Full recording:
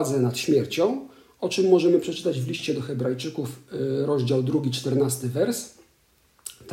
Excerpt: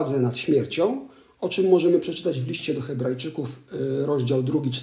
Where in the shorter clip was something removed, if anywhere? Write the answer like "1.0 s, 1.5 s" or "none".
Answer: none